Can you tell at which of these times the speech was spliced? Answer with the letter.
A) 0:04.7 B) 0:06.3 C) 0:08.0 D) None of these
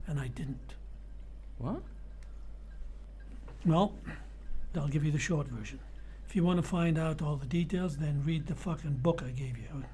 A